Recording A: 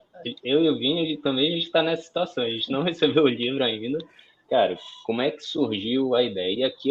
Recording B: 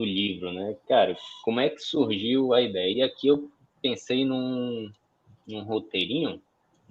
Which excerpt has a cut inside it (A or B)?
A